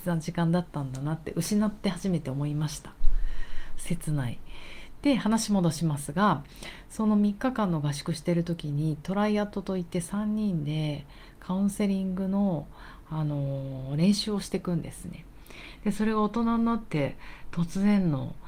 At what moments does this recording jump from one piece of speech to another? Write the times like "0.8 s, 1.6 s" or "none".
15.8 s